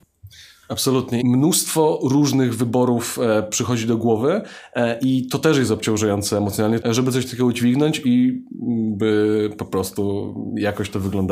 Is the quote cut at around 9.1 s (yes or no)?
no